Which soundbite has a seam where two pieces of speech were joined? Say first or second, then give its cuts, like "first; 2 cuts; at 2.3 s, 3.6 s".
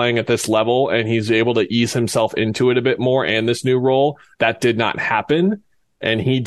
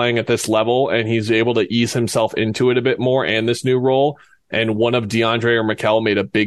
first; 1 cut; at 4.3 s